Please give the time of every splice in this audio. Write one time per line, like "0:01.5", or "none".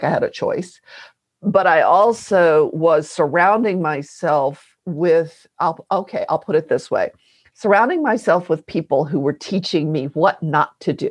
none